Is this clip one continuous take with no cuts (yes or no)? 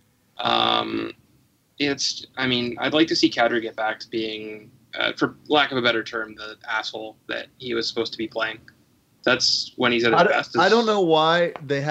yes